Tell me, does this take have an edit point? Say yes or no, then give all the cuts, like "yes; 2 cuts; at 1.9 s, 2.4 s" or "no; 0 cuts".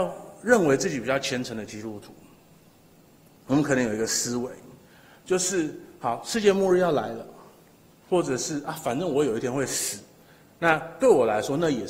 no; 0 cuts